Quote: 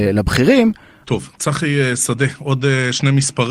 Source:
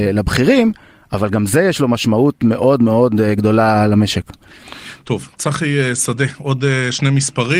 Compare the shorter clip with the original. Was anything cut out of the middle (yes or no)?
yes